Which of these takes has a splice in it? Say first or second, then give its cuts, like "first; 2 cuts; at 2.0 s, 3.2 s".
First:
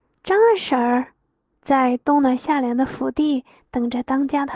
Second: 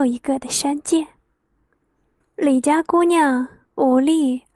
second; 1 cut; at 2.2 s